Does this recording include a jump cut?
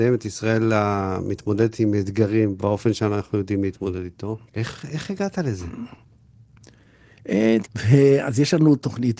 yes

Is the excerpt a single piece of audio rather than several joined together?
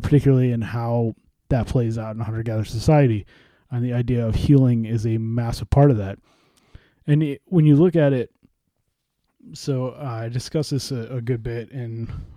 yes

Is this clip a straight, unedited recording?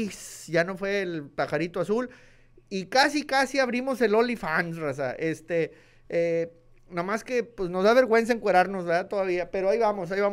yes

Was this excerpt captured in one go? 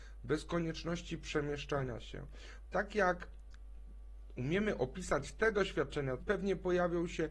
no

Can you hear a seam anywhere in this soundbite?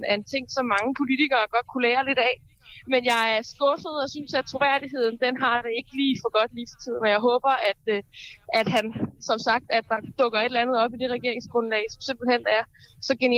no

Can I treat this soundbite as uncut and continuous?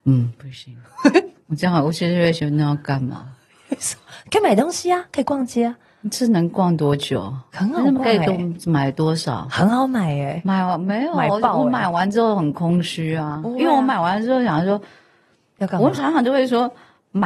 yes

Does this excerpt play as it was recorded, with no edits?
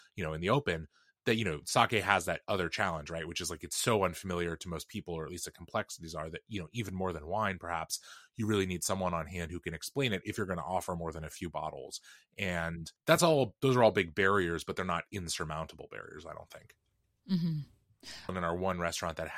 no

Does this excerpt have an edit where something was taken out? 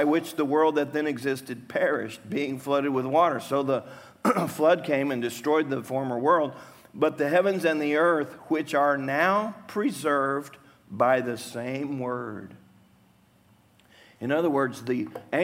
no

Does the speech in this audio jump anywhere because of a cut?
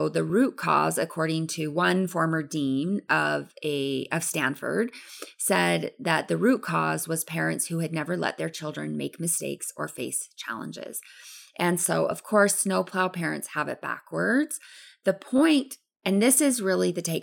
no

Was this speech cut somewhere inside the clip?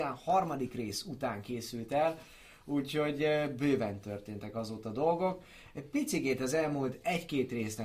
no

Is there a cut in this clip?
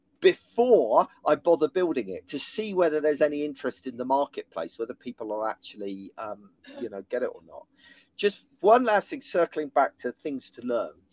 no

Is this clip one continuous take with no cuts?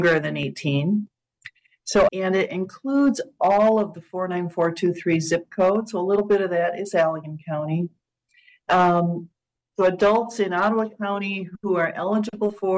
no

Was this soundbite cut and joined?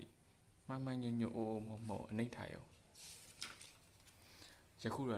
no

